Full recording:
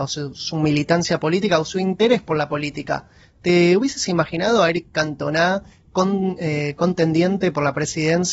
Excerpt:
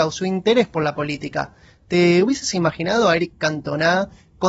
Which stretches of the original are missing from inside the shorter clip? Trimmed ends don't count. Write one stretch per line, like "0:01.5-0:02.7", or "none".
none